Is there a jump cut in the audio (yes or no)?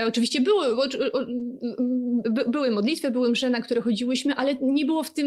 yes